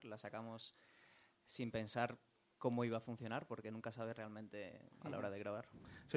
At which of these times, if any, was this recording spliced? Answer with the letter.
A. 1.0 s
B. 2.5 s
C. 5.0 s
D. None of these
C